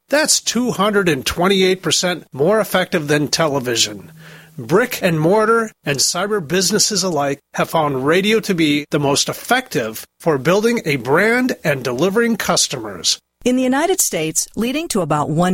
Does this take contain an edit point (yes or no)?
yes